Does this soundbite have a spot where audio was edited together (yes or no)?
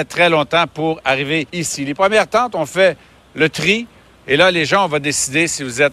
yes